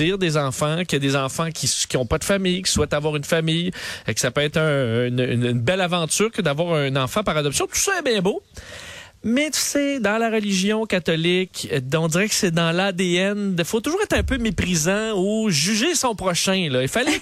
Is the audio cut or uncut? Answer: uncut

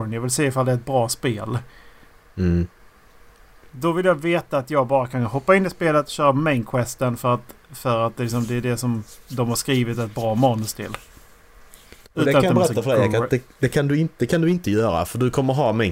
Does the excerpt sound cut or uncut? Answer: uncut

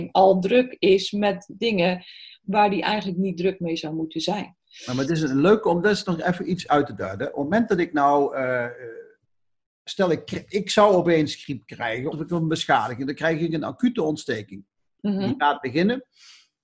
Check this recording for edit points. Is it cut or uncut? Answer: cut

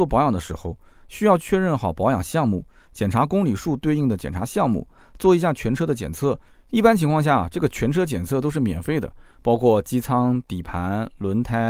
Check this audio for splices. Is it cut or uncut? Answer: uncut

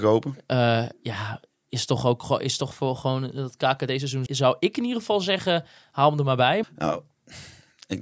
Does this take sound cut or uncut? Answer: cut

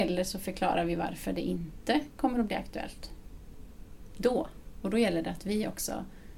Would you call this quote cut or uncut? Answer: cut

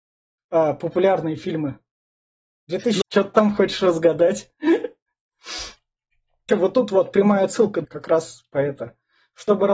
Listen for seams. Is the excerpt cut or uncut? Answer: cut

